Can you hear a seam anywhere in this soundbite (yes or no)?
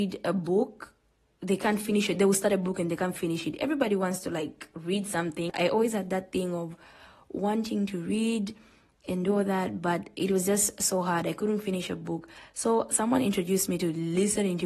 no